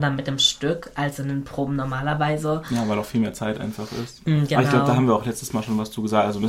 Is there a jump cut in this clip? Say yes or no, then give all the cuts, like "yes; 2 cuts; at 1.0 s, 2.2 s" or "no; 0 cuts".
no; 0 cuts